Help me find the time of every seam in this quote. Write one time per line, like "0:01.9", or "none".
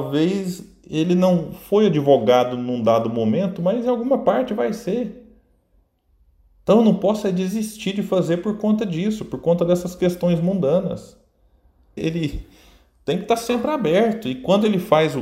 0:12.0